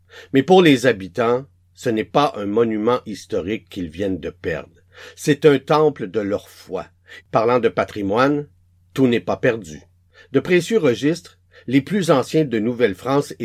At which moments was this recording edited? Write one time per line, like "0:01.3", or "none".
0:07.2